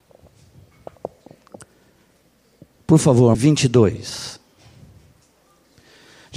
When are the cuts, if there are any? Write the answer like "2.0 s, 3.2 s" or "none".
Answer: 3.3 s